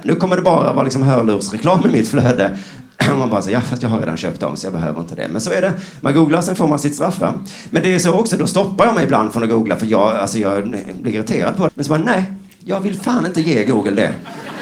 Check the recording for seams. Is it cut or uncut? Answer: cut